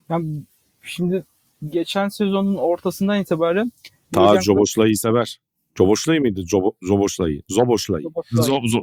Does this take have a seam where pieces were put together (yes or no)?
no